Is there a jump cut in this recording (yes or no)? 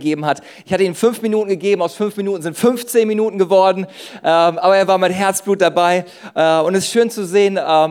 no